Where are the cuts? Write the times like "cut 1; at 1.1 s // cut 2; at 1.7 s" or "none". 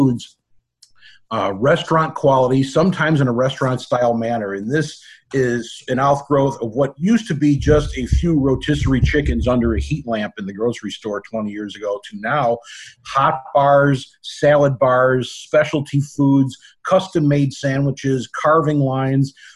none